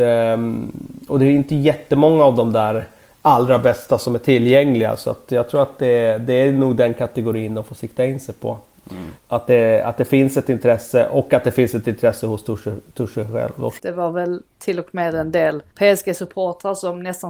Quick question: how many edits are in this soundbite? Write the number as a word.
three